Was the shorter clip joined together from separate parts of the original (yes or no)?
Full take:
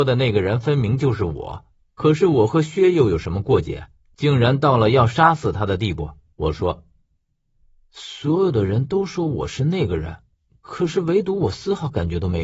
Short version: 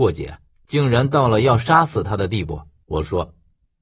no